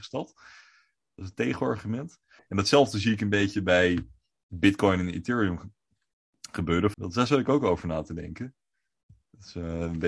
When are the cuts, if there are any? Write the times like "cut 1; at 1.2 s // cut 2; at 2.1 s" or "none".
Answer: cut 1; at 2.4 s // cut 2; at 6.9 s